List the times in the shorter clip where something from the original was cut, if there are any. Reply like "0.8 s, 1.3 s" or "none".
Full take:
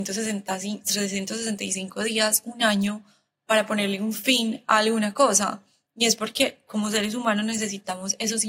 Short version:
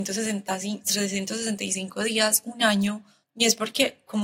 3.2 s